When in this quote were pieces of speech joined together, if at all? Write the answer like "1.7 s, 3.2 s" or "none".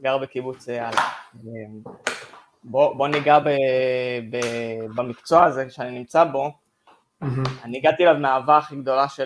none